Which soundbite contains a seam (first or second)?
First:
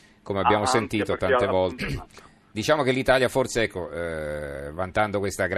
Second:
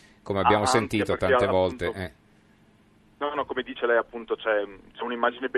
first